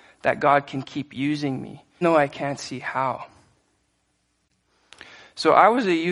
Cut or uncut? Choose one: cut